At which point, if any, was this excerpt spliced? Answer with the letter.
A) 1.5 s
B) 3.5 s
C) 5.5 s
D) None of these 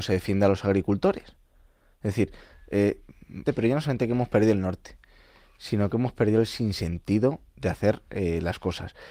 B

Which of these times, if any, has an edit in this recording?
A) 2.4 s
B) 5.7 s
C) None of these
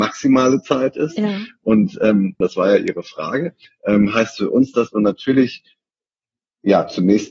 A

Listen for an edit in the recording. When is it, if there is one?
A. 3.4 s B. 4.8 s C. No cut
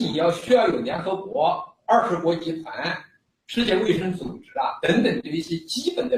C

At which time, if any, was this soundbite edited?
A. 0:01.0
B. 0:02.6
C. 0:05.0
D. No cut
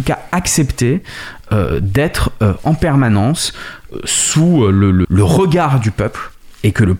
C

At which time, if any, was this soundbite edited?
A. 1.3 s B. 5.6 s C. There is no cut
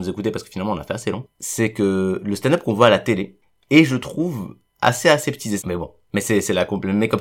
B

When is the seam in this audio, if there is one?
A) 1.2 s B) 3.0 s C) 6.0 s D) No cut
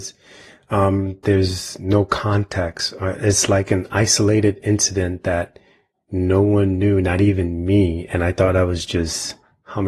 A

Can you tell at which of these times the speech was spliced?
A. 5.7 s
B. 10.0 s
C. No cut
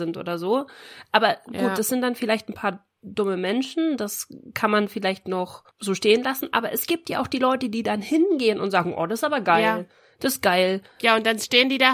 A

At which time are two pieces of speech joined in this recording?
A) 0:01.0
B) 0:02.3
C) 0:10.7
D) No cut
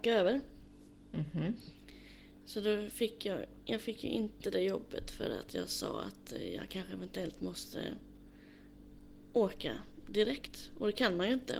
D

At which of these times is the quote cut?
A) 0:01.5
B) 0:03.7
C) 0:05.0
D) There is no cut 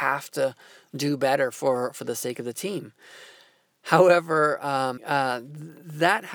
C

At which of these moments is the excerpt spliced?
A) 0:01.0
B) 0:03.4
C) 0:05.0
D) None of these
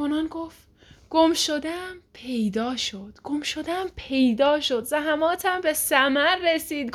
D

